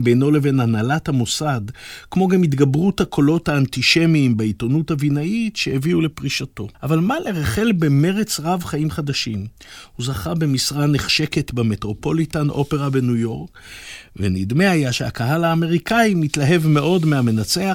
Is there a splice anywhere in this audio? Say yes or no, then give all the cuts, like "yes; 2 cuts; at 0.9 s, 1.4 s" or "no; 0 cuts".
yes; 1 cut; at 6.7 s